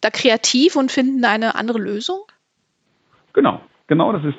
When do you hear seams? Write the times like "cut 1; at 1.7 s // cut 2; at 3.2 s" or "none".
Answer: none